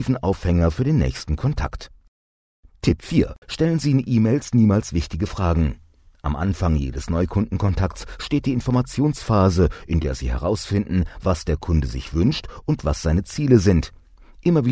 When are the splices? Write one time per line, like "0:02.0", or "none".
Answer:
0:03.4